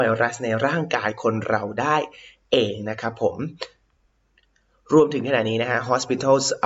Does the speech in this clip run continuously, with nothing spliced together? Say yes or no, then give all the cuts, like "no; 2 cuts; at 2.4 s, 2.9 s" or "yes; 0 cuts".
yes; 0 cuts